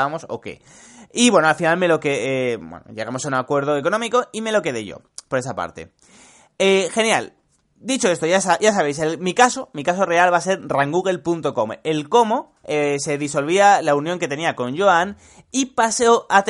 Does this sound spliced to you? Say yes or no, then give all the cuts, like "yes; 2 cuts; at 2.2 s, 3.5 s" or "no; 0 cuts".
no; 0 cuts